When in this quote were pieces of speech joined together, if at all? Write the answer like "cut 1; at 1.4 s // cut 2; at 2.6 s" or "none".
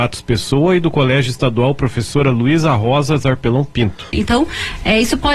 cut 1; at 4.1 s

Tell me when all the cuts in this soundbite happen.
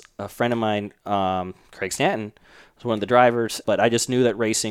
cut 1; at 3.6 s

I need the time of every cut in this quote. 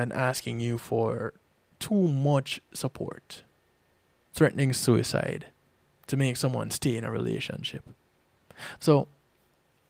cut 1; at 4.3 s // cut 2; at 8.8 s

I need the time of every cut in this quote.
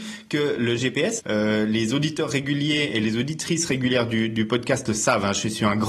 cut 1; at 1.2 s

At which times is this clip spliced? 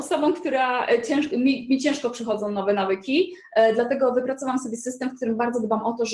none

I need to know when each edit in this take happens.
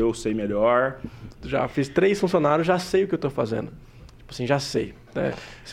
cut 1; at 1.3 s

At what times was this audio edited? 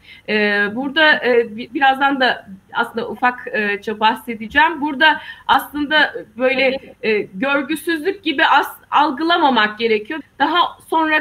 cut 1; at 10.2 s

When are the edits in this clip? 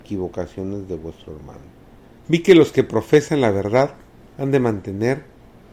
cut 1; at 2.2 s

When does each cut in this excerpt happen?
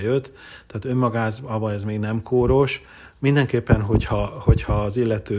cut 1; at 4.3 s

